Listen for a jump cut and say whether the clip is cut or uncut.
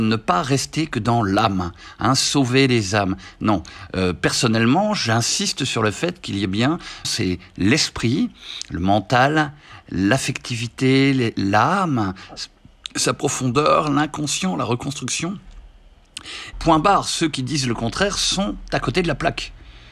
cut